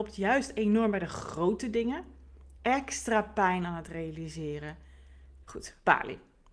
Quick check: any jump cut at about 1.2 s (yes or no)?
no